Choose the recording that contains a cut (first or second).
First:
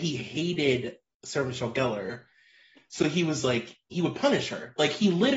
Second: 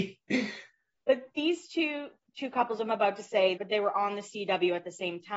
second